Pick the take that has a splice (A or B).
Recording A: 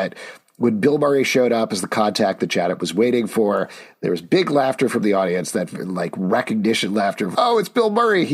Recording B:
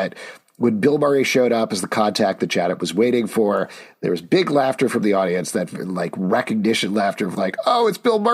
A